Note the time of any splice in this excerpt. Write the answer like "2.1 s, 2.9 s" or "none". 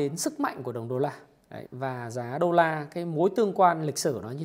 1.7 s